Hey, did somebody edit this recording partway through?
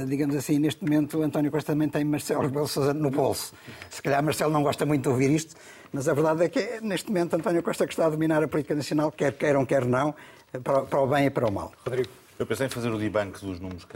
no; 0 cuts

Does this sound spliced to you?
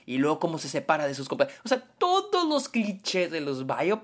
no; 0 cuts

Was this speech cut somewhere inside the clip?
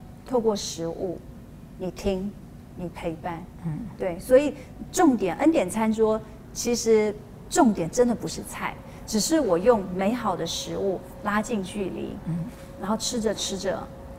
no; 0 cuts

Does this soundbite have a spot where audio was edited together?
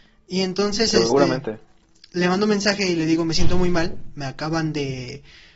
no; 0 cuts

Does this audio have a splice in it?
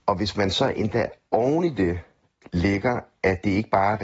no; 0 cuts

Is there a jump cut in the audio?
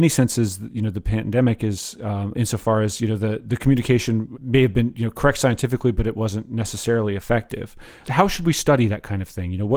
yes; 2 cuts; at 2.3 s, 4.3 s

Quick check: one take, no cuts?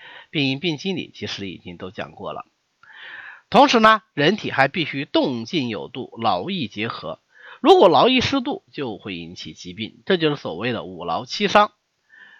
yes; 0 cuts

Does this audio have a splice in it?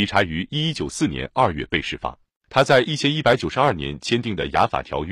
yes; 1 cut; at 2.4 s

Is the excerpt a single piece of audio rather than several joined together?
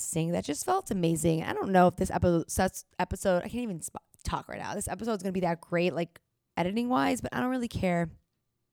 yes; 0 cuts

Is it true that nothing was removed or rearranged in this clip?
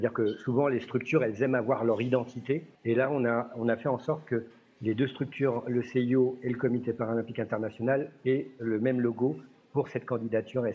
no; 1 cut; at 2.8 s

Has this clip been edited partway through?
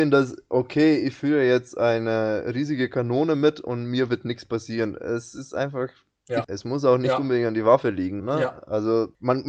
yes; 2 cuts; at 6.4 s, 8.2 s

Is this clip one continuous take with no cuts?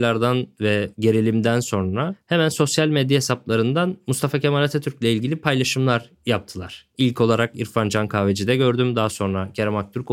yes; 0 cuts

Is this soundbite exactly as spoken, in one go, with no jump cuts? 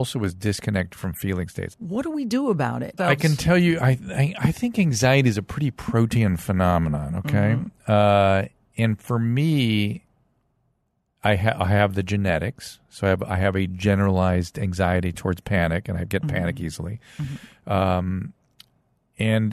no; 2 cuts; at 1.7 s, 3.0 s

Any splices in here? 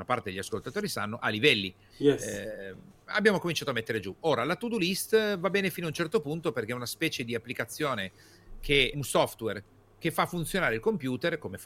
yes; 2 cuts; at 1.9 s, 8.9 s

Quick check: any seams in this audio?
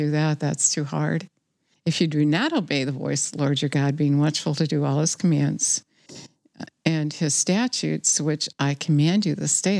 yes; 1 cut; at 1.8 s

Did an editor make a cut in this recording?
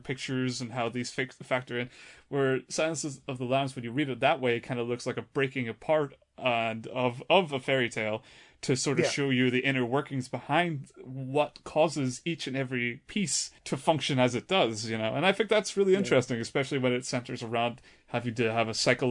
no; 0 cuts

